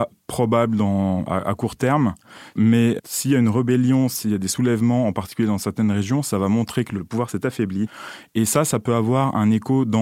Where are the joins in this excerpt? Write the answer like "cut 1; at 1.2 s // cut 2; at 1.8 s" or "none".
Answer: none